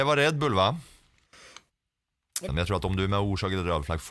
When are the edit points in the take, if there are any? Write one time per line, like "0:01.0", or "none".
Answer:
0:02.5

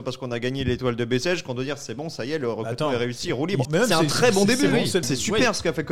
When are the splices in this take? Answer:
0:03.7
0:05.0

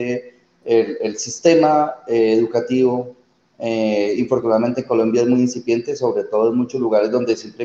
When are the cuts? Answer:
none

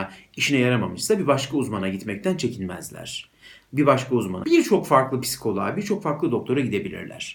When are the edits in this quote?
0:04.4

